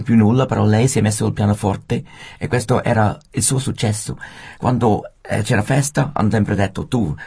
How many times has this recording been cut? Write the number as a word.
zero